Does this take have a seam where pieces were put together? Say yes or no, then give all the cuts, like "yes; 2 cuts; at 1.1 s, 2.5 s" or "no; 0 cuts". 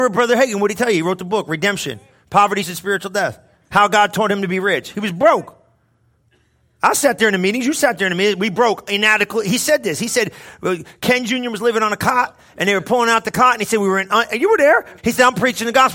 yes; 2 cuts; at 2.6 s, 15.0 s